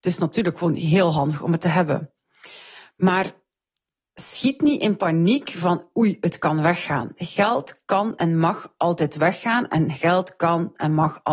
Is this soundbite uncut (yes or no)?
yes